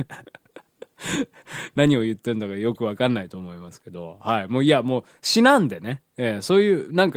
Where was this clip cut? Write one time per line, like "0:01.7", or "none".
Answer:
none